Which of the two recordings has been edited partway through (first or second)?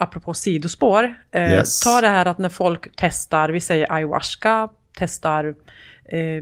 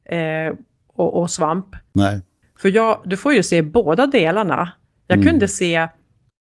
second